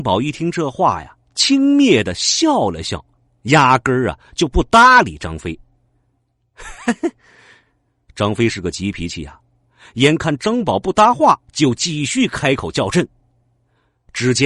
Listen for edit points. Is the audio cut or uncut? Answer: cut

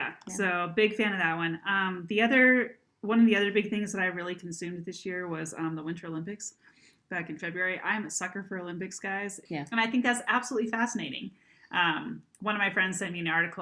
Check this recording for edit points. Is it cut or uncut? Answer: cut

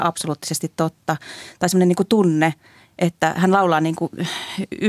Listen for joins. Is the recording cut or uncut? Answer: uncut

